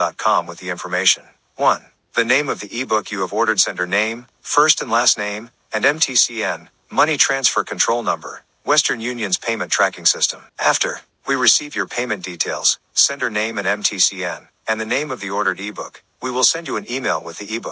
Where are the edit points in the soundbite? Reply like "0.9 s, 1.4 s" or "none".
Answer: 10.5 s